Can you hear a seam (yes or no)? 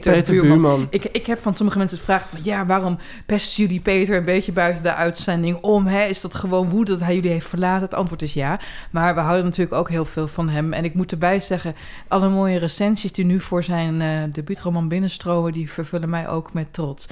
no